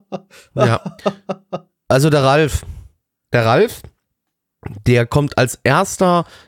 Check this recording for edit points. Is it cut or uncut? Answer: uncut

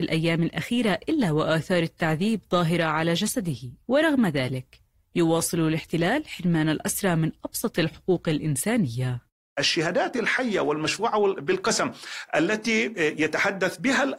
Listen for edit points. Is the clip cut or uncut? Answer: cut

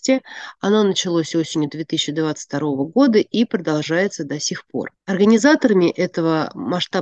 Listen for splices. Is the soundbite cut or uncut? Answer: uncut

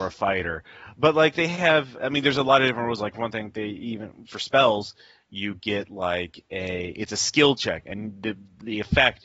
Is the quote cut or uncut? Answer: cut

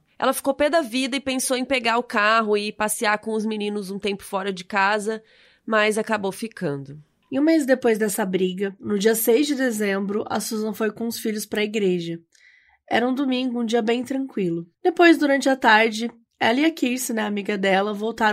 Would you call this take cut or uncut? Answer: uncut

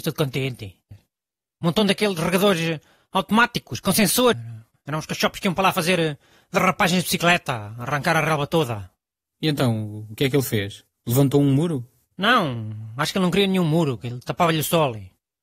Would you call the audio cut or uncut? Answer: cut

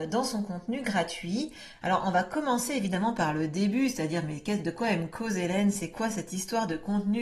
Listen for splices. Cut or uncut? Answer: uncut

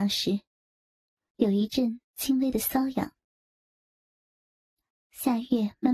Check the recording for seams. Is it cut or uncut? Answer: uncut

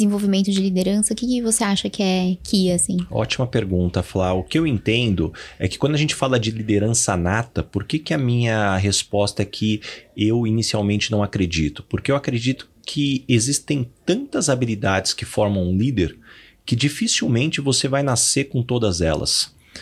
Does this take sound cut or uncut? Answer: uncut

